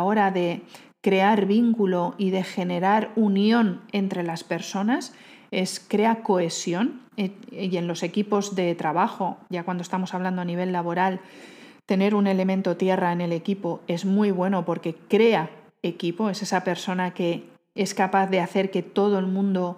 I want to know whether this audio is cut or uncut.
uncut